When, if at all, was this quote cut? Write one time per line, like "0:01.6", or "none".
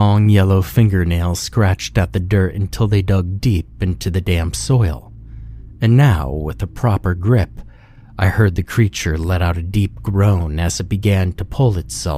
none